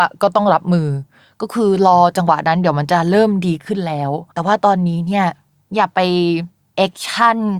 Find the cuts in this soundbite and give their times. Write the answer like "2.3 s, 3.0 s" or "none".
4.3 s